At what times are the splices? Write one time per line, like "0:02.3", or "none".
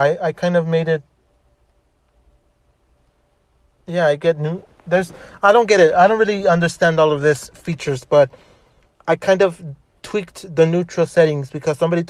none